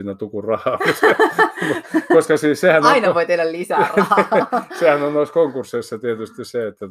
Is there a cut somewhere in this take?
no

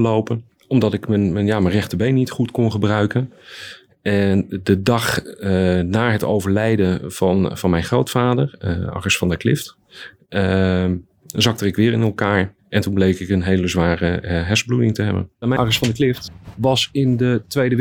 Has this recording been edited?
yes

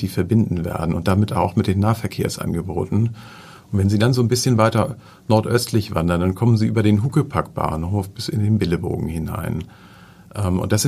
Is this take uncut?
yes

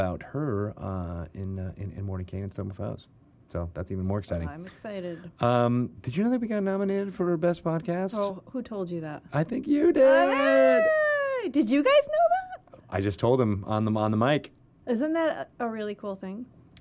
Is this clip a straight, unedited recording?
yes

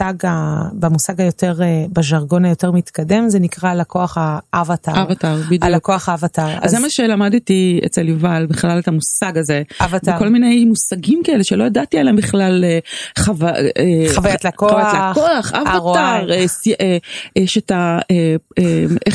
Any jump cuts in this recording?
no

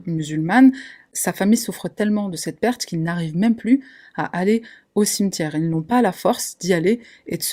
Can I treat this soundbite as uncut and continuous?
no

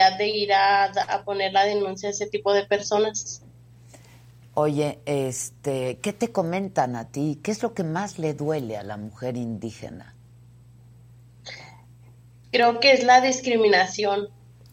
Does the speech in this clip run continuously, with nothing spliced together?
yes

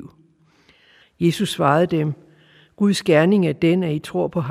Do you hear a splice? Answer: yes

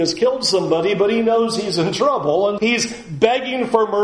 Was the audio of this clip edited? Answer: yes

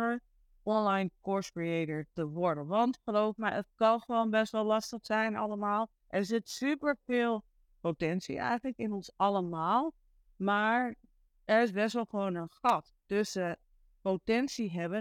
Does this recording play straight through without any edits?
no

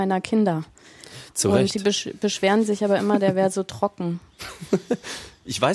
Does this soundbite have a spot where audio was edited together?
no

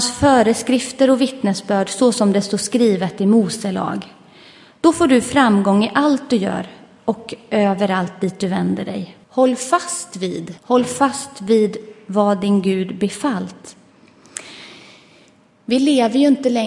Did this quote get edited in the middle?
yes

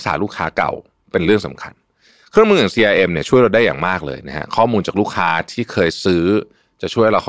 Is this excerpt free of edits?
yes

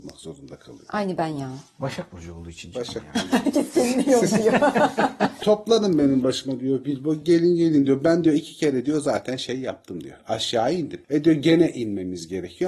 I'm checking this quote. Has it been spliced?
no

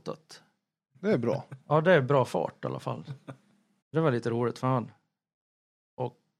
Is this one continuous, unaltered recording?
no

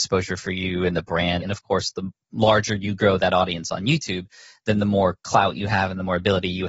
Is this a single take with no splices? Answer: no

